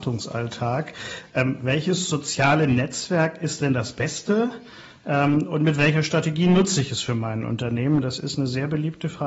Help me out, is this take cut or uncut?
uncut